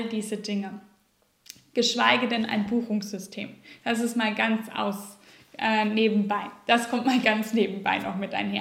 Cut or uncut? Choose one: uncut